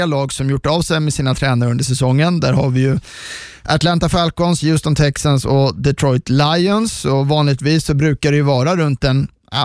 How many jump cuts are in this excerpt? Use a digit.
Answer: 0